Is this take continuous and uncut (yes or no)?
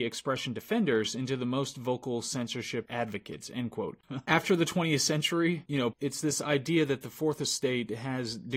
no